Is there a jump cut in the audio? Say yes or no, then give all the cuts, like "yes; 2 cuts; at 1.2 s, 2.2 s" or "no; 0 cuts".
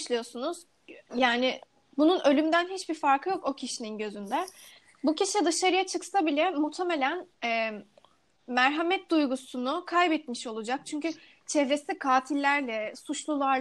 yes; 2 cuts; at 1.1 s, 7.3 s